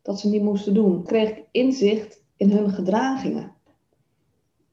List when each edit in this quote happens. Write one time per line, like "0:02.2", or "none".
0:01.1
0:02.3